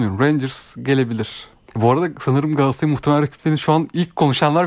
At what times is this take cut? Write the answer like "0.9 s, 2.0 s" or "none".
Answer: 1.7 s